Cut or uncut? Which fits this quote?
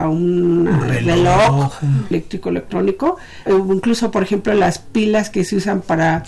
cut